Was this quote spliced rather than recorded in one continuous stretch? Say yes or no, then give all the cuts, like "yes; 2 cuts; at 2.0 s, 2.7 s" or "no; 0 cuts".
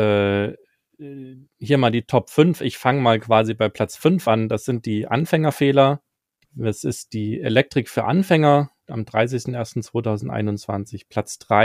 yes; 2 cuts; at 6.4 s, 8.8 s